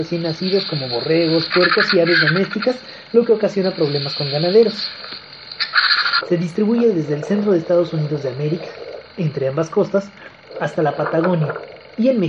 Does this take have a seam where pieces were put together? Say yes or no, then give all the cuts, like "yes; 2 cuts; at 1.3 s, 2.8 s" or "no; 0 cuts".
yes; 2 cuts; at 1.5 s, 6.2 s